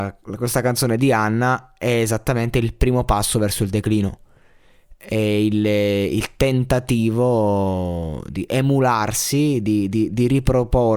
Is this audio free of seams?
yes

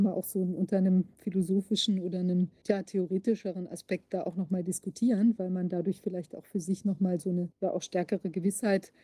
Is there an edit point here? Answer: yes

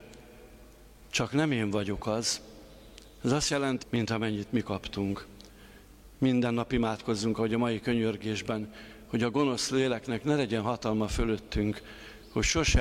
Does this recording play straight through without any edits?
no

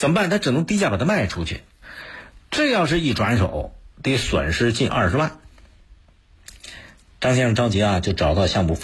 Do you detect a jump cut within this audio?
no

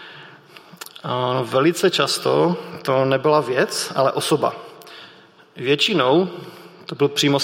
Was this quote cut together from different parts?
no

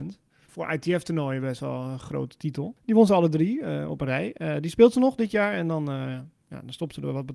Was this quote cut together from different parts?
no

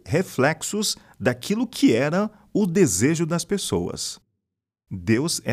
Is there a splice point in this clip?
no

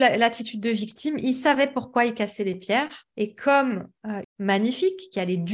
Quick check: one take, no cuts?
no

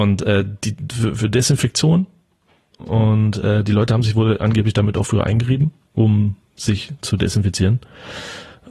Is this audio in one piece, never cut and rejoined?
yes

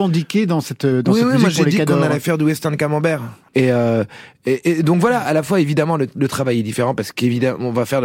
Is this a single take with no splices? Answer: no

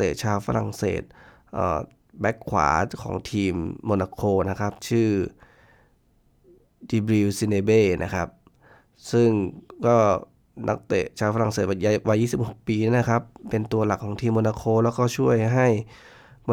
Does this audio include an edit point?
no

